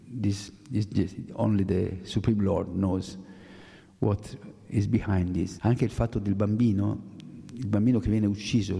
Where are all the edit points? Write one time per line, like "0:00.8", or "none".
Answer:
0:05.6